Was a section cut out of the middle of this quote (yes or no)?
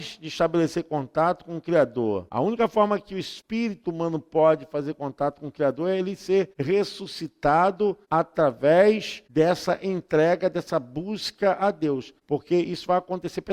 no